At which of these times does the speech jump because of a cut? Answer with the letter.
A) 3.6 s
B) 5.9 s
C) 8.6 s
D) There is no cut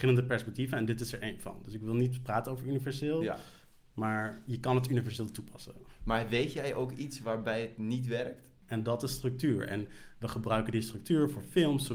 C